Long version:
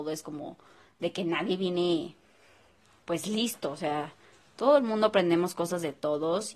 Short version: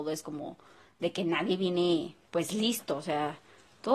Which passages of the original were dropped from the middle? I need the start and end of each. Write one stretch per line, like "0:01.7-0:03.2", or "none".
0:02.2-0:03.0

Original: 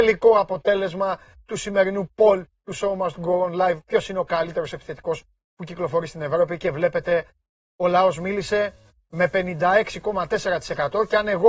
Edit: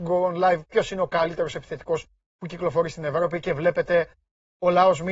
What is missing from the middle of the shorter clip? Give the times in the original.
none

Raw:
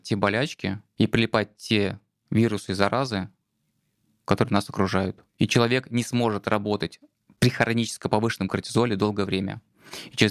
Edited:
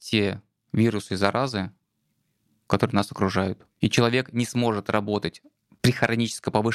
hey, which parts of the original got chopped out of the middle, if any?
none

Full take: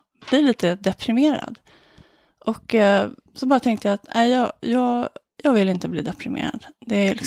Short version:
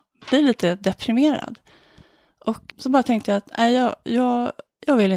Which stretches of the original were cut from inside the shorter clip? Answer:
0:02.7-0:03.2

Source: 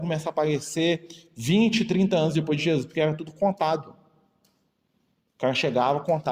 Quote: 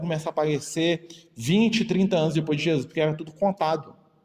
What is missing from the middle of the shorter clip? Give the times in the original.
none

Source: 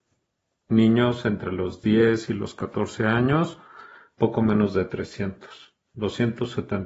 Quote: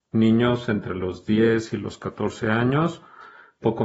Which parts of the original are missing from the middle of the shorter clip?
none

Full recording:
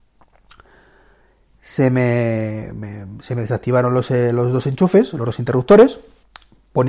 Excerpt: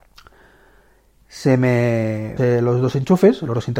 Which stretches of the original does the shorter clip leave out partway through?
0:02.7-0:04.1

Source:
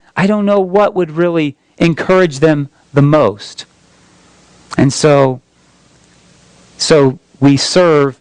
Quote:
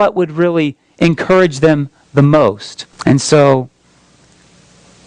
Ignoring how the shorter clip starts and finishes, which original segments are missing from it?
0:03.7-0:04.6

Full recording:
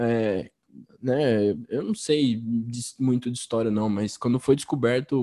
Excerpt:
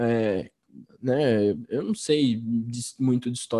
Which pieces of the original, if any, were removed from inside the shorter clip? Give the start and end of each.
none

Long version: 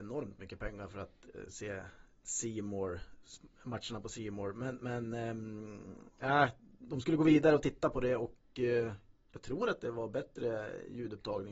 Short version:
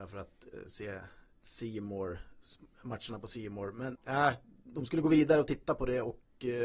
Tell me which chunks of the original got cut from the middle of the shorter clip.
0:04.8-0:06.1

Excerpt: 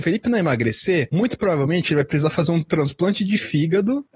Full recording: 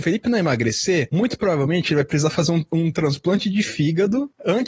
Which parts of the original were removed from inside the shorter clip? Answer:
0:02.7-0:02.9

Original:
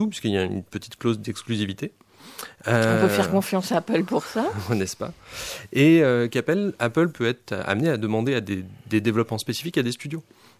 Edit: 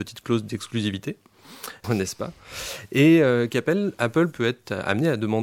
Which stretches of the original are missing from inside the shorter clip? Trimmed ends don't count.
0:02.6-0:04.6

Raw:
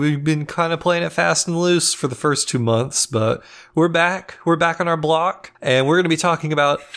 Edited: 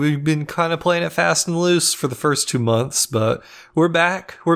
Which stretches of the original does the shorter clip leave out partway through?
none

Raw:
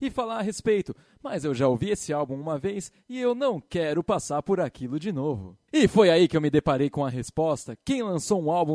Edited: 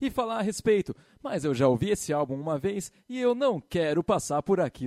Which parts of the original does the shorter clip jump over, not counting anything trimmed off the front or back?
none

